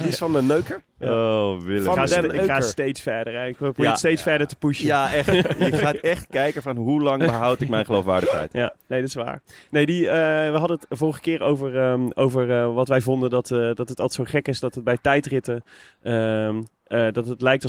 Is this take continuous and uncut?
yes; 0 cuts

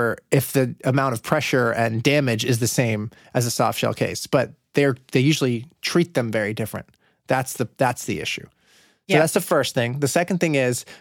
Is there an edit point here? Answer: no; 0 cuts

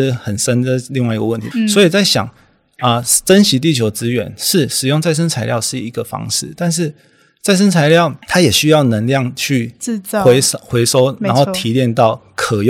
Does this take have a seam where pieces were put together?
yes; 1 cut; at 1.5 s

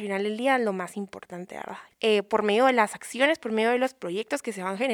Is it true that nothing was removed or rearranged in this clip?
no; 1 cut; at 1.9 s

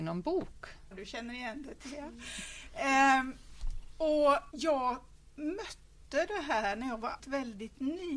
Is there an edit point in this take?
yes; 3 cuts; at 0.9 s, 4.5 s, 7.2 s

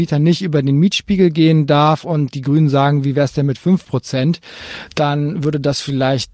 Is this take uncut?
yes; 0 cuts

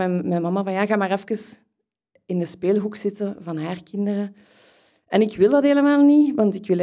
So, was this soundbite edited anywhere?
no; 0 cuts

